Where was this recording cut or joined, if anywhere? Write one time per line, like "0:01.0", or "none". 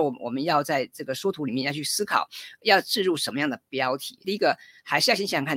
0:04.2